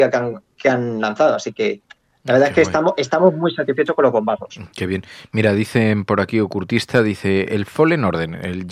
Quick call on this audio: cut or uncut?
uncut